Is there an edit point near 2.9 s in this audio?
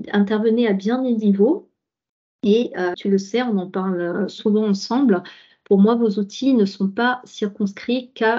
yes; 1 cut; at 2.9 s

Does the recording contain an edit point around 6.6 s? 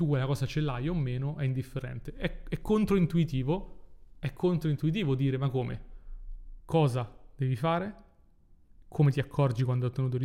yes; 1 cut; at 6.6 s

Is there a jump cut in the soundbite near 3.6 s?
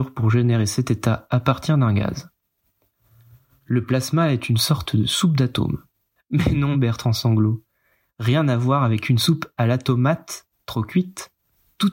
no; 1 cut; at 6.7 s

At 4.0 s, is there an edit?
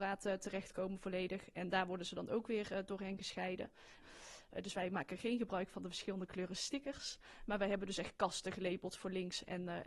yes; 1 cut; at 4.0 s

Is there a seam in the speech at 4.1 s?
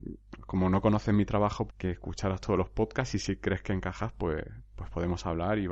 no; 1 cut; at 1.7 s

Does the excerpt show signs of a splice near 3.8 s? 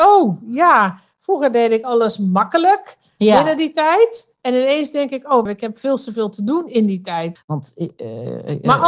no; 2 cuts; at 5.5 s, 7.4 s

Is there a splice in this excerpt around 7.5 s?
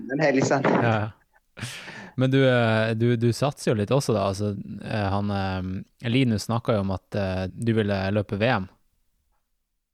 yes; 1 cut; at 7.5 s

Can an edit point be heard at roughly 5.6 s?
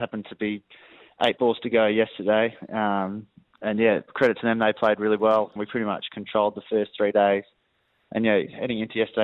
yes; 1 cut; at 5.6 s

